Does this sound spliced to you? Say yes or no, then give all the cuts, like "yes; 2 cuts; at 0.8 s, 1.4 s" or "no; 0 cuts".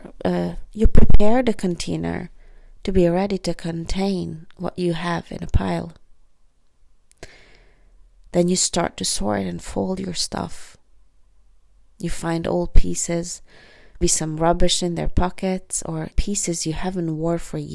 yes; 2 cuts; at 14.0 s, 16.1 s